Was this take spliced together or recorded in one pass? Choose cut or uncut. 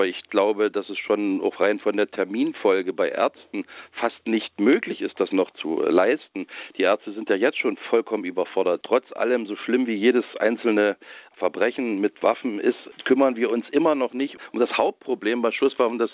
uncut